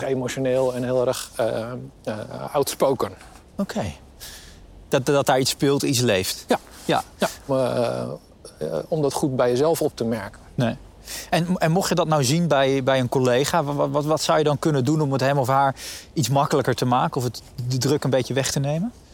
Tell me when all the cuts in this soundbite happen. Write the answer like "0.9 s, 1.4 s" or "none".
4.9 s, 7.5 s